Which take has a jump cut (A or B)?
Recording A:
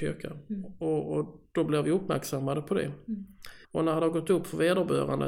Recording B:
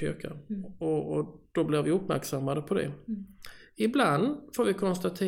A